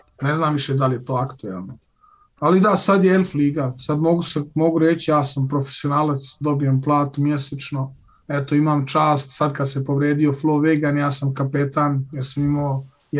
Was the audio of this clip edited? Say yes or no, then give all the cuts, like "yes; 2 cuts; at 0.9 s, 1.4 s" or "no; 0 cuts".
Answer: no; 0 cuts